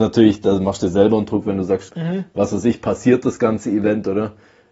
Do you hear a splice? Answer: yes; 1 cut; at 1.9 s

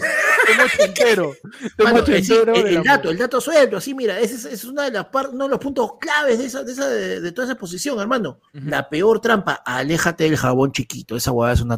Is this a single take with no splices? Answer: no; 1 cut; at 8.5 s

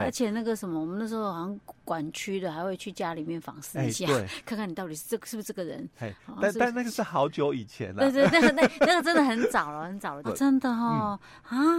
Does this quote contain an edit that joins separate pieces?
yes; 1 cut; at 10.2 s

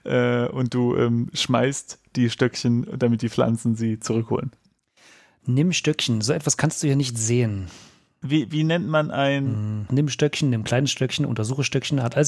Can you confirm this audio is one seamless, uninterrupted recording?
no; 1 cut; at 9.9 s

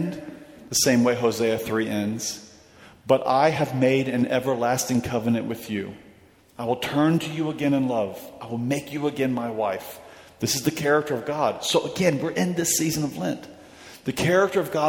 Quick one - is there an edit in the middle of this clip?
no; 0 cuts

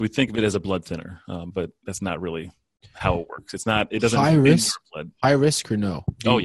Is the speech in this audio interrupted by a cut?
no; 0 cuts

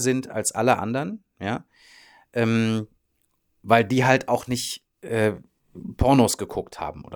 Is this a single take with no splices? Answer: yes; 0 cuts

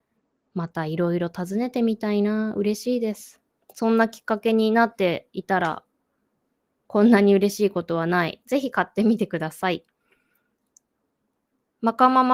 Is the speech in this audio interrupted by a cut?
yes; 1 cut; at 8.4 s

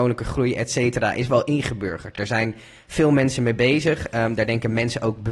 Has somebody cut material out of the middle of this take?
no; 0 cuts

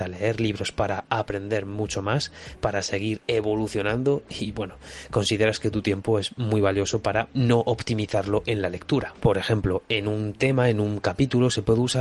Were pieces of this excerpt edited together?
yes; 1 cut; at 9.2 s

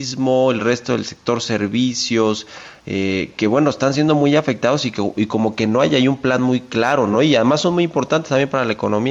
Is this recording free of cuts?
yes; 0 cuts

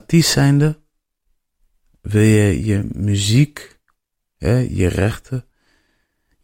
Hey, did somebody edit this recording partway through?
no; 0 cuts

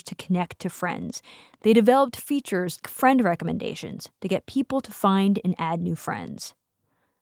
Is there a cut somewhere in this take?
yes; 1 cut; at 2.8 s

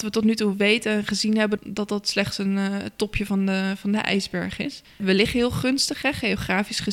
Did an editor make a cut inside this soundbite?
yes; 2 cuts; at 1.6 s, 4.8 s

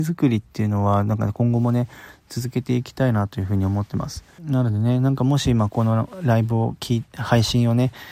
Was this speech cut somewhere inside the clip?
yes; 1 cut; at 4.4 s

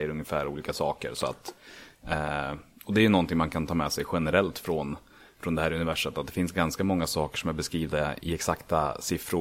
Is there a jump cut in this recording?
no; 0 cuts

